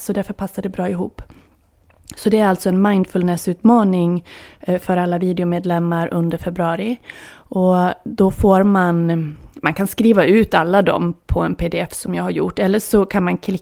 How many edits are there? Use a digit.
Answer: 0